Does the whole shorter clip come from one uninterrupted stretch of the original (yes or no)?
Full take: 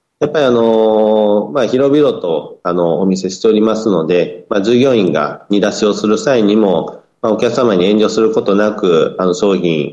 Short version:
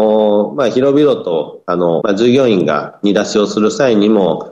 no